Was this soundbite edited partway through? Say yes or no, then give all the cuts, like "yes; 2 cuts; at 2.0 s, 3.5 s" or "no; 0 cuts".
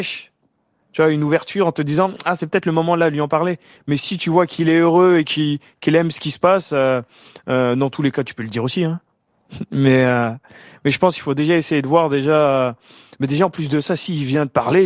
no; 0 cuts